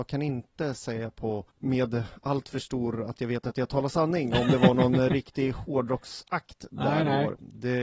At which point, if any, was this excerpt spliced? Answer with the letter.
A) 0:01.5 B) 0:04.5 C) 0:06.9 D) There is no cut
A